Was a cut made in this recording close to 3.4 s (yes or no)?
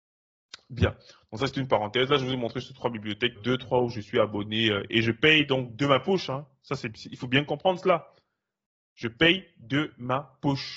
yes